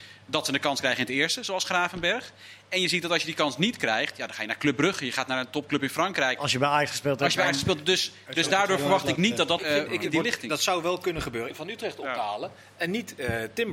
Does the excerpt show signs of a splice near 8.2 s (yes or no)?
no